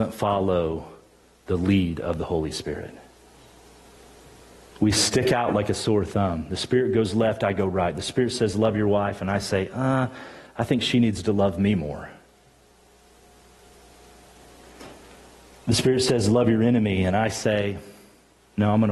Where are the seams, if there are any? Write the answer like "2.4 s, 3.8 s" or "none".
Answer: none